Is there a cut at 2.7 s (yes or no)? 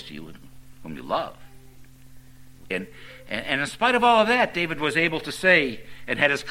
yes